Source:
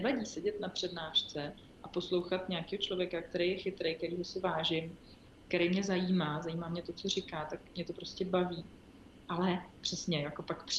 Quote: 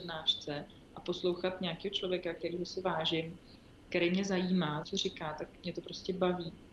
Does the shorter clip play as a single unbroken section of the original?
no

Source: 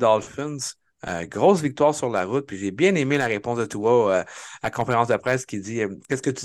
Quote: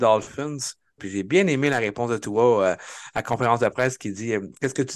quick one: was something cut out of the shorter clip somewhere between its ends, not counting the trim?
yes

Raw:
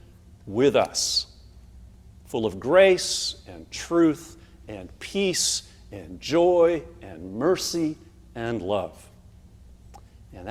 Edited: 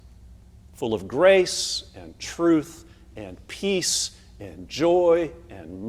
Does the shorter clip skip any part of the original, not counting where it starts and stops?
no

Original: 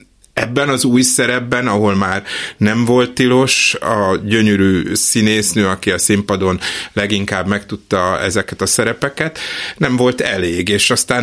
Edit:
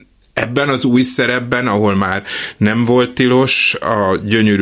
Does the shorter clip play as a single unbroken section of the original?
yes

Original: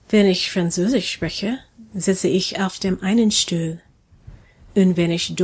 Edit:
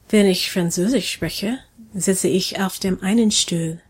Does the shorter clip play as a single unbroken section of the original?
yes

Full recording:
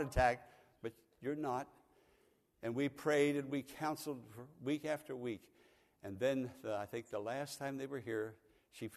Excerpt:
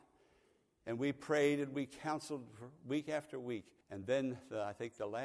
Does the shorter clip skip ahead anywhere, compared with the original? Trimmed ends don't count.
yes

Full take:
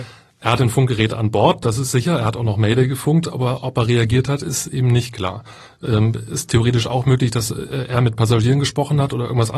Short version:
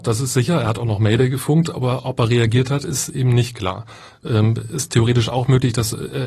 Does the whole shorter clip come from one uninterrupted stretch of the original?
yes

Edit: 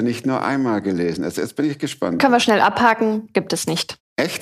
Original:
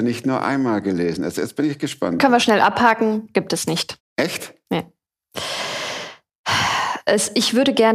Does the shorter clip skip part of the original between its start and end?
no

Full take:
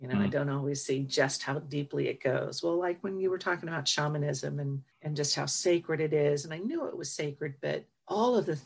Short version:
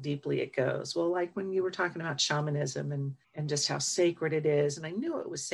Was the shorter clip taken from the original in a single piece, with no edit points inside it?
yes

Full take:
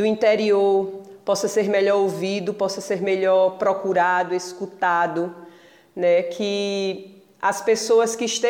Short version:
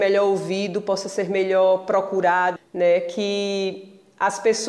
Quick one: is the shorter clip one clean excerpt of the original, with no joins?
no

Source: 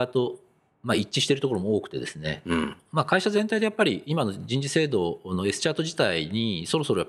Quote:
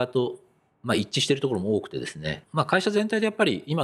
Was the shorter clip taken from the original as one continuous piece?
no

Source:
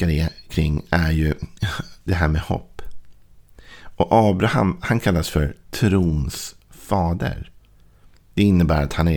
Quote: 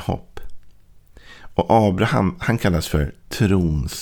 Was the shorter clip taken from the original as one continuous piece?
yes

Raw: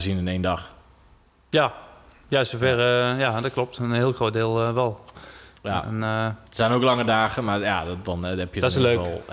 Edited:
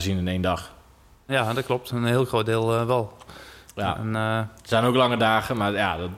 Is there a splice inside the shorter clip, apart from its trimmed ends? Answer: yes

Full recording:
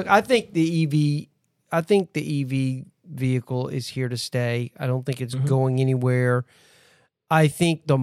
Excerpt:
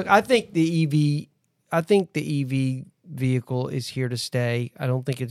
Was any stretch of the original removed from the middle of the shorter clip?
no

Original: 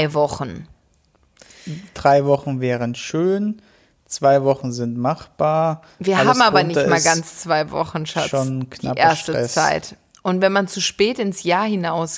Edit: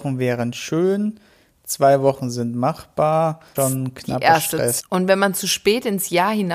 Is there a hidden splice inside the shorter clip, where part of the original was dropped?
yes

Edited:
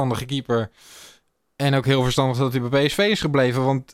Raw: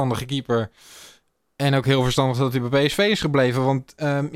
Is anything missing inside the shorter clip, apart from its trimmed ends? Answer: no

